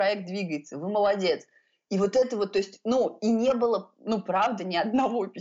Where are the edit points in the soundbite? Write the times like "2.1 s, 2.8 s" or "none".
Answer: none